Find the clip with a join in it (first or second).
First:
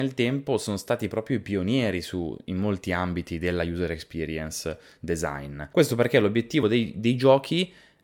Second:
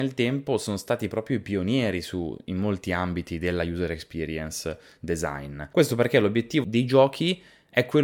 second